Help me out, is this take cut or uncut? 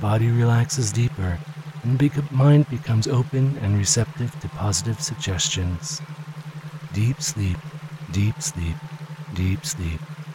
uncut